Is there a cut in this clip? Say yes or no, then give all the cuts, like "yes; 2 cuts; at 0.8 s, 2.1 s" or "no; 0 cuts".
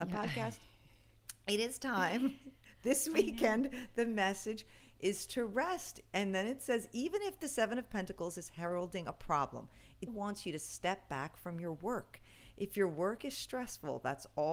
yes; 1 cut; at 10.1 s